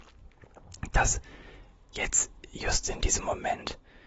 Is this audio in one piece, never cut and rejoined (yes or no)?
yes